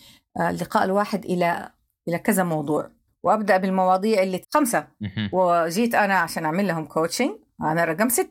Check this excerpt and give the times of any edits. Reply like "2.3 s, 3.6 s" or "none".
4.4 s

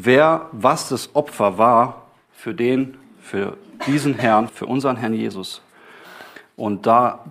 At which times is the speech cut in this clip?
4.5 s

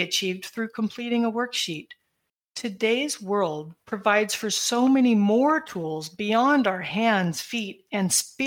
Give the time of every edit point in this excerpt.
2.4 s

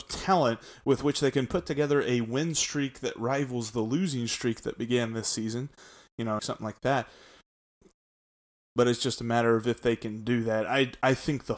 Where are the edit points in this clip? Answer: 6.4 s

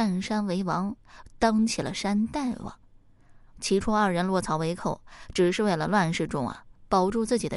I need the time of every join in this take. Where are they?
none

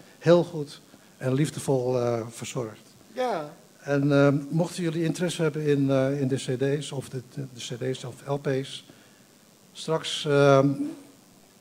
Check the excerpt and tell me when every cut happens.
none

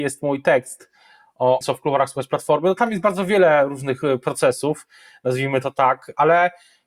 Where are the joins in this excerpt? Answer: 1.6 s

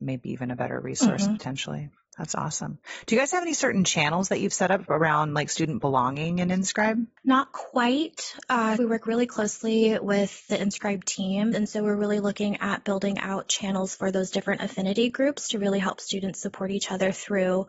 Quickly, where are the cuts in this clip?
8.8 s, 11.5 s

